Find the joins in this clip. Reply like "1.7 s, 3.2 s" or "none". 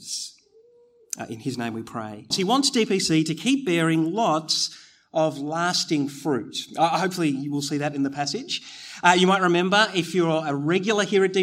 2.3 s